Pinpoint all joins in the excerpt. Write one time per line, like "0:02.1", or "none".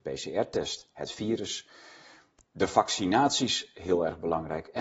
none